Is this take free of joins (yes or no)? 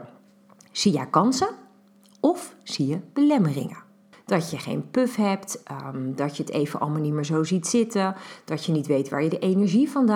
no